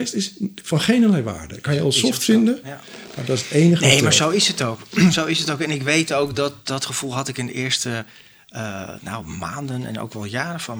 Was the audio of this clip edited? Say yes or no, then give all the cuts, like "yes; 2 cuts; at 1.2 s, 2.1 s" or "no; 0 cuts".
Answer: no; 0 cuts